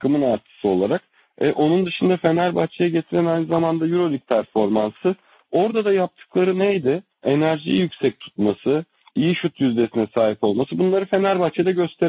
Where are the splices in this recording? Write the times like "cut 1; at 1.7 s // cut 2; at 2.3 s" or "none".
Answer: cut 1; at 9.1 s